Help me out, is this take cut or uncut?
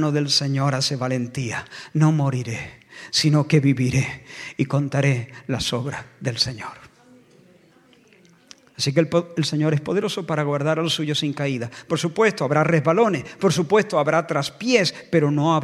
uncut